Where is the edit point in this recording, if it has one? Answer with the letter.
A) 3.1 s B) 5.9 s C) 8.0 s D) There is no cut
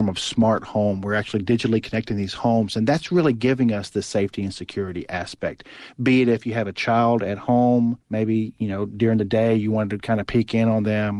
C